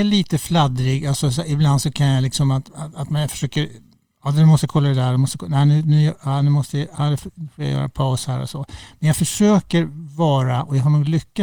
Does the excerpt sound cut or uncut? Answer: uncut